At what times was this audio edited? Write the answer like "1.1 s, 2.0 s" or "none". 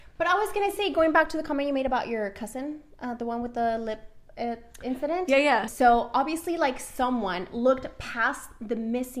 5.7 s